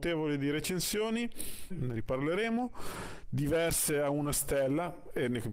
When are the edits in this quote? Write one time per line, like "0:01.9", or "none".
0:01.7